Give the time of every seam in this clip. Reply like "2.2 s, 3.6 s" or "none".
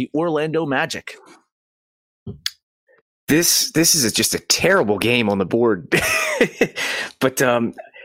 none